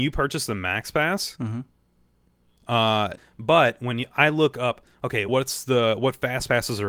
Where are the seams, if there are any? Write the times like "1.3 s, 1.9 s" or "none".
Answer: 3.2 s, 5.3 s